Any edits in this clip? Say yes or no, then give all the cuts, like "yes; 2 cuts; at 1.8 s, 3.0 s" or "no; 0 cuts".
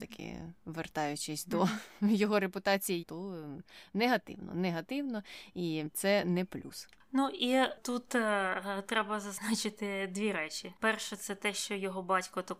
yes; 1 cut; at 3.0 s